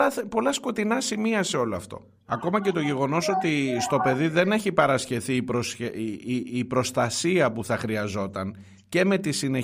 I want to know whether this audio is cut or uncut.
cut